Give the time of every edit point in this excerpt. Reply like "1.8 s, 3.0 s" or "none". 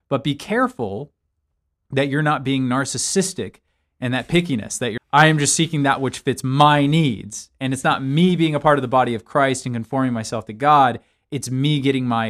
5.0 s